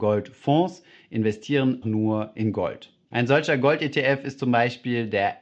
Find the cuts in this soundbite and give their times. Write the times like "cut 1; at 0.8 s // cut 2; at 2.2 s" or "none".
cut 1; at 1.8 s // cut 2; at 3.0 s